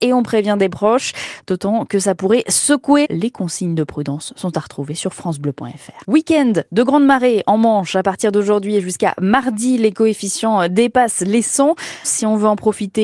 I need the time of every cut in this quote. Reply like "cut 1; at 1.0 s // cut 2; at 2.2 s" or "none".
cut 1; at 3.0 s // cut 2; at 6.0 s // cut 3; at 12.0 s